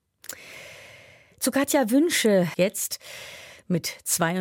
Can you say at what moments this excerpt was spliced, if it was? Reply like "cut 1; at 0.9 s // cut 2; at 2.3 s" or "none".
cut 1; at 2.5 s